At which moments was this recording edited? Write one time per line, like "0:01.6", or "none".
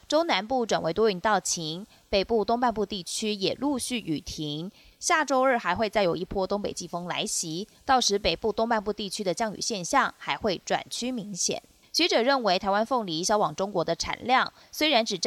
0:11.8